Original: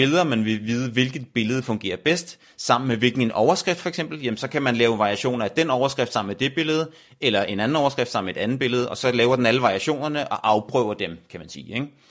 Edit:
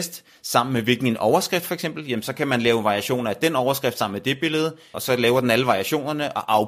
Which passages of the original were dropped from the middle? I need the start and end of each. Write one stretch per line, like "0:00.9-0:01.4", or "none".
0:07.1-0:08.9